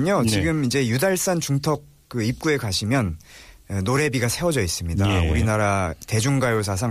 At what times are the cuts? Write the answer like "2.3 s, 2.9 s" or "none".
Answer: none